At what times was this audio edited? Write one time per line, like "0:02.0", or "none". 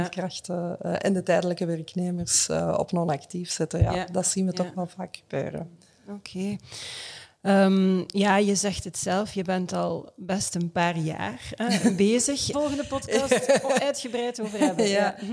0:12.5